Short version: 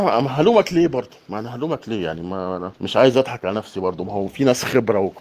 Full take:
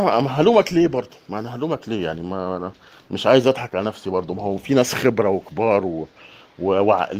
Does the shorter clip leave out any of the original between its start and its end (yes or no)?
yes